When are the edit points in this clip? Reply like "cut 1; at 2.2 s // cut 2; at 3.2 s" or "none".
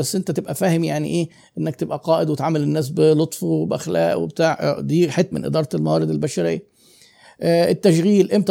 cut 1; at 5.3 s

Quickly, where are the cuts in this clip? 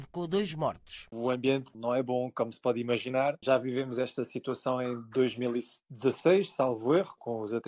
none

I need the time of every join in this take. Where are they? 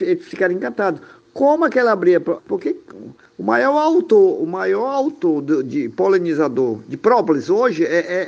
cut 1; at 2.4 s

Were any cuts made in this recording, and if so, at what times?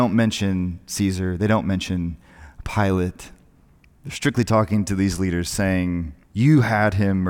cut 1; at 6.2 s

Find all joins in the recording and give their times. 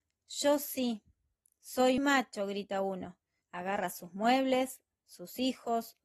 cut 1; at 2.0 s // cut 2; at 3.4 s

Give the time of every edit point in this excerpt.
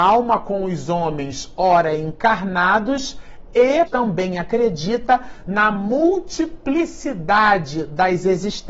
cut 1; at 3.9 s

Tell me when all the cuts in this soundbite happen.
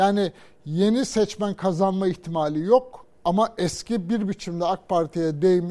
cut 1; at 3.1 s

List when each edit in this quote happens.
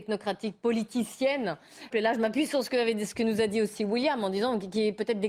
cut 1; at 1.9 s

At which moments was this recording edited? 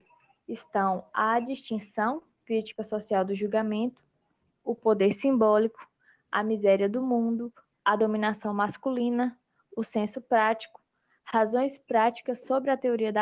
none

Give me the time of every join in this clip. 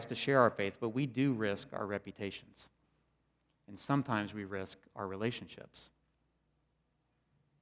none

